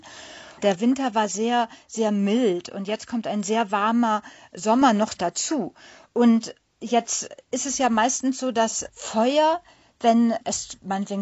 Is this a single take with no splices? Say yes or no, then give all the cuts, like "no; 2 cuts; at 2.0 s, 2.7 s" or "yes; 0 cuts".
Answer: yes; 0 cuts